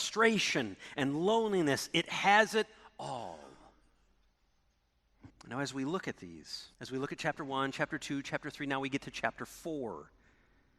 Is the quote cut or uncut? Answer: cut